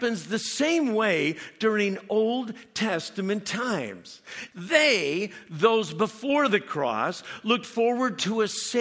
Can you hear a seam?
yes; 1 cut; at 4.5 s

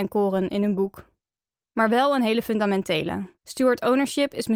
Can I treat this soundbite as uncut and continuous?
no; 1 cut; at 3.4 s

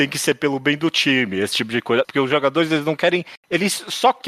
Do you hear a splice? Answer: yes; 1 cut; at 2.0 s

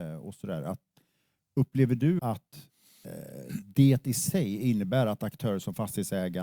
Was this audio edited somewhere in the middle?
yes; 1 cut; at 2.2 s

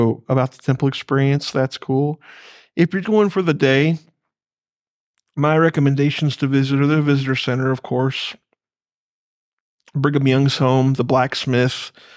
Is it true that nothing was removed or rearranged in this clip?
no; 1 cut; at 3.0 s

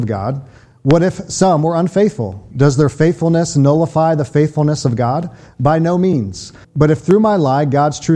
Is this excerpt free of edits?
no; 1 cut; at 6.6 s

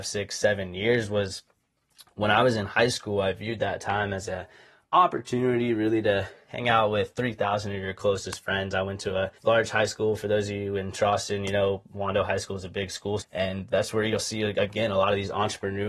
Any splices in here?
yes; 2 cuts; at 9.4 s, 13.2 s

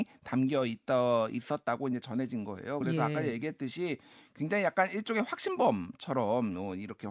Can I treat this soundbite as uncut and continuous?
yes; 0 cuts

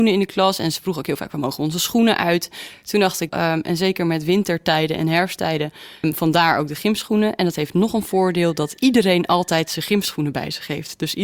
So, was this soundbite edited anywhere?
yes; 2 cuts; at 3.3 s, 6.0 s

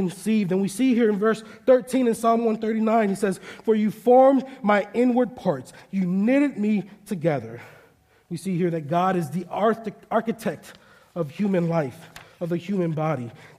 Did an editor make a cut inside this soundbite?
no; 0 cuts

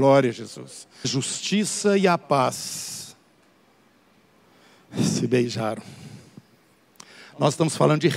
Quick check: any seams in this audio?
yes; 1 cut; at 1.0 s

